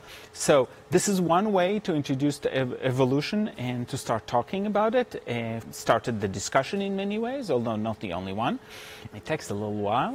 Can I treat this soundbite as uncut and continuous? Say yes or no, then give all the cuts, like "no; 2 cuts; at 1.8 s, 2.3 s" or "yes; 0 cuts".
no; 2 cuts; at 5.6 s, 9.1 s